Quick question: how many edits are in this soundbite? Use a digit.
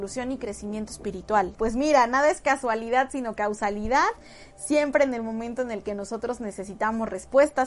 1